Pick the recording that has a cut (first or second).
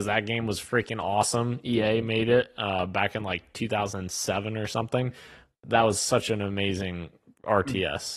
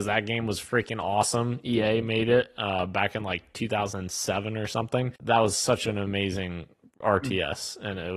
second